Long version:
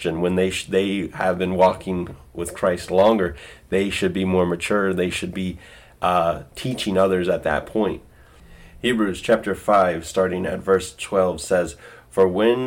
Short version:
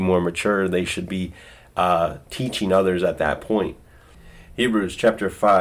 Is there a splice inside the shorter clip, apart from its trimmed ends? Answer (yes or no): no